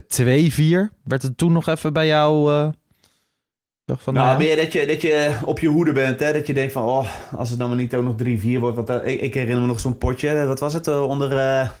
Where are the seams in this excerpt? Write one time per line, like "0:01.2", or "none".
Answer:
none